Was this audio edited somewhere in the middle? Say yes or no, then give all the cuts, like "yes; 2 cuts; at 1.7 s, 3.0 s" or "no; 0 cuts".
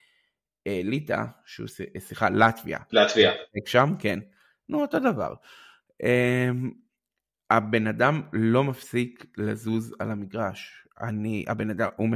no; 0 cuts